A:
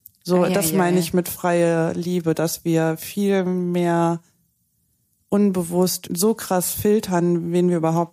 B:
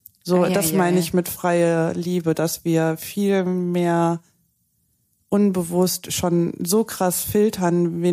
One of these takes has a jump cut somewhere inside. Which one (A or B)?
A